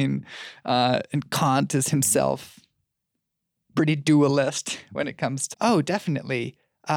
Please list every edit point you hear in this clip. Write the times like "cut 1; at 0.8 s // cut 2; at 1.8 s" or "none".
cut 1; at 5.5 s